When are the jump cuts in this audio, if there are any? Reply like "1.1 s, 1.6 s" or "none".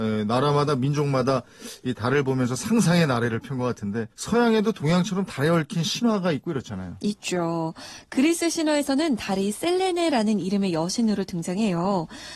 4.1 s